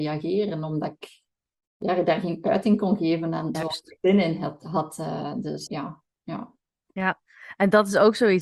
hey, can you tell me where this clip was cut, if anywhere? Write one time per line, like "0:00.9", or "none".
0:03.5
0:05.7

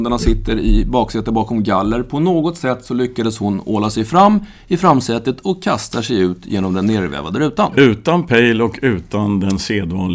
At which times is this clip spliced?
none

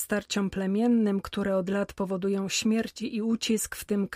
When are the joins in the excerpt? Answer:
none

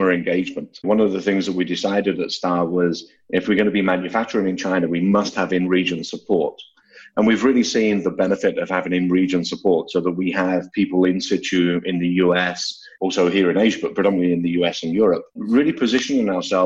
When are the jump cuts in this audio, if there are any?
0:13.0

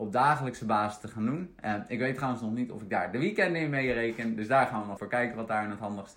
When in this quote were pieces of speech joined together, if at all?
0:05.0

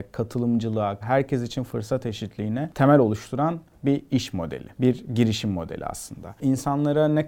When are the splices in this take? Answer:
0:01.0

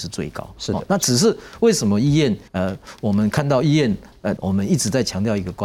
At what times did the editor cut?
0:02.5
0:04.4

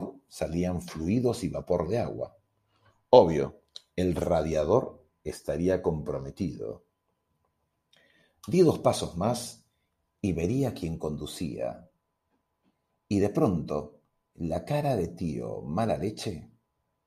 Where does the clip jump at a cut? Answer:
none

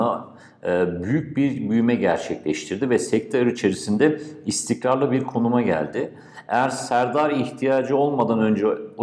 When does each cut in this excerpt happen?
none

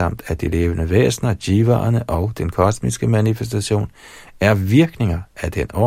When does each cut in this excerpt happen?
none

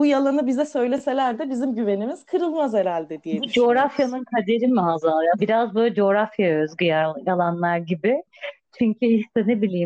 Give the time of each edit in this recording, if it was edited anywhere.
0:05.4

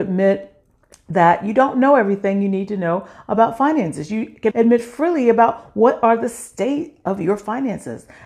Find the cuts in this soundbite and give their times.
0:04.5

